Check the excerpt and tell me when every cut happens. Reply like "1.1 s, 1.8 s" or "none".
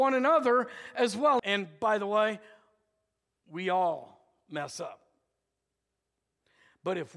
1.4 s